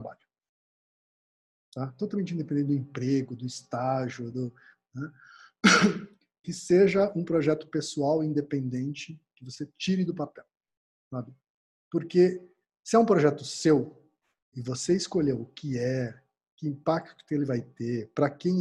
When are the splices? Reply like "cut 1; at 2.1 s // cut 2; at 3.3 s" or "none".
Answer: none